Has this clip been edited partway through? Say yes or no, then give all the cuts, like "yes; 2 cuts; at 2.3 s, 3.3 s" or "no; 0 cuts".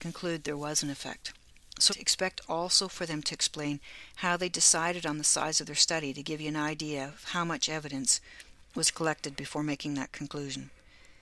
yes; 1 cut; at 1.9 s